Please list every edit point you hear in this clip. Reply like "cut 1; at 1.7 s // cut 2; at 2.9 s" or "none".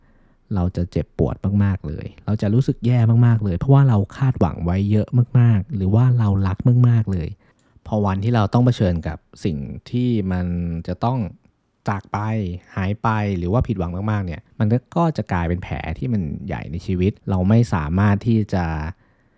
cut 1; at 14.5 s // cut 2; at 17.2 s